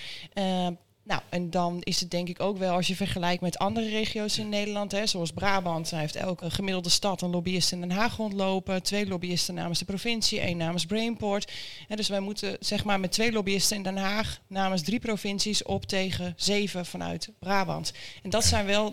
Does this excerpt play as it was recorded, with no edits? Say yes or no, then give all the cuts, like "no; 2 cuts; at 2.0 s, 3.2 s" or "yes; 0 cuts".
no; 1 cut; at 6.4 s